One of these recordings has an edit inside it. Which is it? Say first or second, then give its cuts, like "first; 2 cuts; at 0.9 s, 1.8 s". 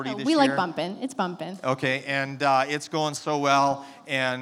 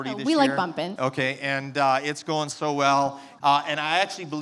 second; 2 cuts; at 1.0 s, 3.4 s